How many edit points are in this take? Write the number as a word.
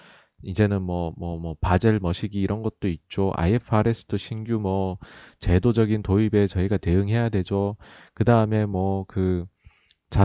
zero